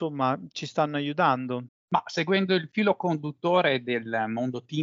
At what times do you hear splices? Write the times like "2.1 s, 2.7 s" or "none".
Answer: 1.7 s

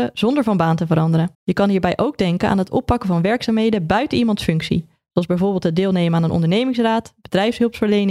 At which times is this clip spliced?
1.3 s

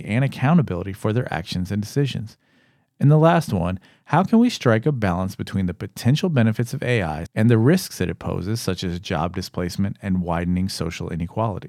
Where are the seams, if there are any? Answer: 7.3 s

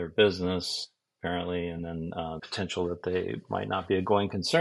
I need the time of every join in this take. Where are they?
2.4 s

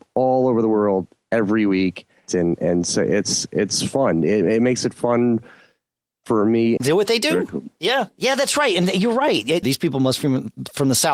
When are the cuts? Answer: 2.3 s, 6.8 s, 9.6 s

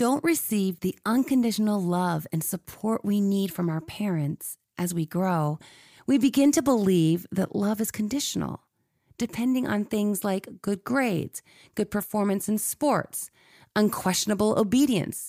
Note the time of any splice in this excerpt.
none

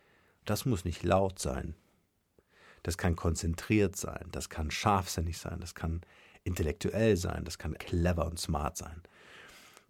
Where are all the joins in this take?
7.8 s

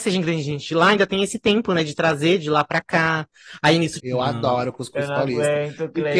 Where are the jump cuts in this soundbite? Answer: 4.0 s

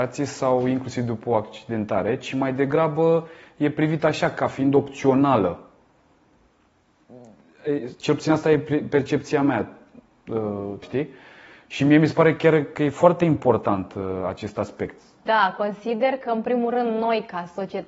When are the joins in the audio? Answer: 10.8 s, 15.3 s

